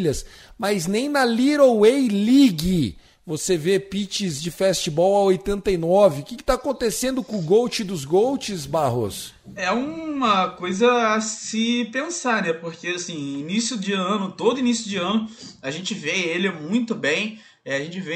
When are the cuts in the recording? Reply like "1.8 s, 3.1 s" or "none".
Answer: none